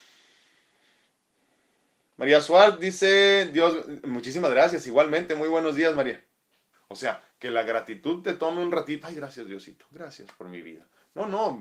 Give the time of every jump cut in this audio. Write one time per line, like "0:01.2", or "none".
0:06.7
0:09.0